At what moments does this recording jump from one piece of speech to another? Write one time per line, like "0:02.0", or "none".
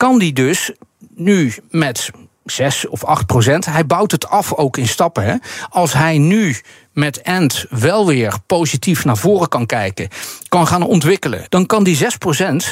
0:11.5